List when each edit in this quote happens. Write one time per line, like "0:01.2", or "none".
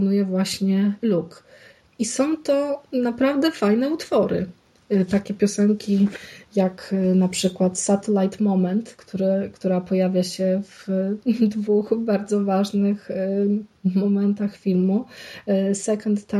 none